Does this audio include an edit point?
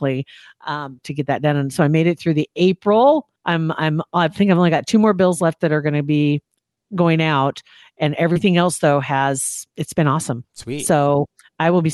yes; 3 cuts; at 1.0 s, 3.4 s, 9.7 s

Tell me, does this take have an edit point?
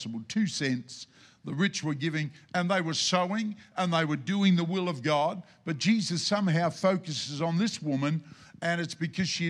no; 0 cuts

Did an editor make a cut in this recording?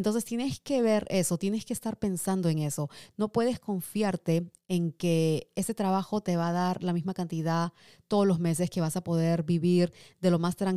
no; 0 cuts

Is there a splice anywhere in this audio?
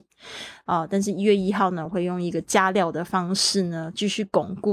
no; 0 cuts

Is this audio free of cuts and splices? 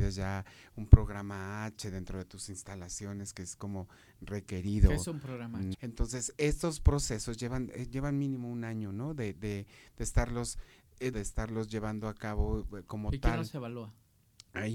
no; 2 cuts; at 5.7 s, 11.1 s

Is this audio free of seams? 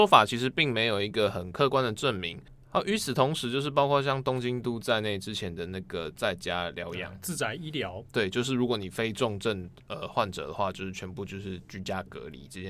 yes; 0 cuts

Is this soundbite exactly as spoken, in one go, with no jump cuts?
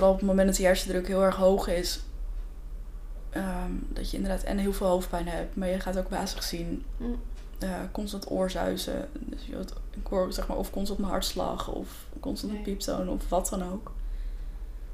yes; 0 cuts

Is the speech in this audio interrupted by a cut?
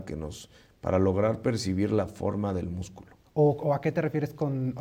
yes; 1 cut; at 3.3 s

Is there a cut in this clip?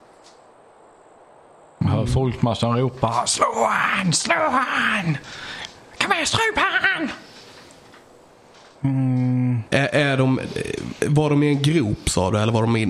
no; 0 cuts

